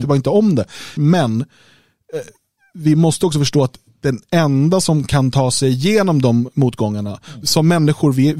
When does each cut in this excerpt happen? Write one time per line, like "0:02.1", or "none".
0:01.0
0:07.4